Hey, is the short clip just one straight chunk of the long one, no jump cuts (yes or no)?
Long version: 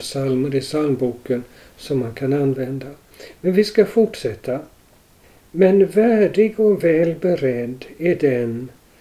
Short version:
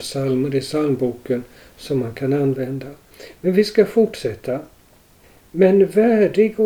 yes